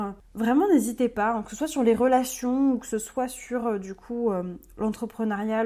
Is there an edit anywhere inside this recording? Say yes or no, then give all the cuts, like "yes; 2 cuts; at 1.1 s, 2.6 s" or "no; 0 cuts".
no; 0 cuts